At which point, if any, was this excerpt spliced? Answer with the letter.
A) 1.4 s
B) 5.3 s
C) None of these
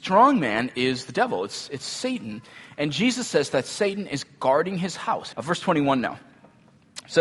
B